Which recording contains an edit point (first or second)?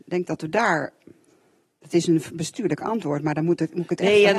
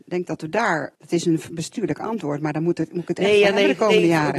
second